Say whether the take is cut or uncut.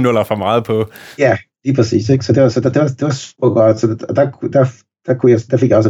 uncut